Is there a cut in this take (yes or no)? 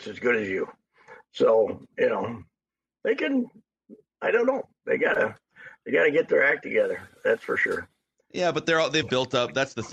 yes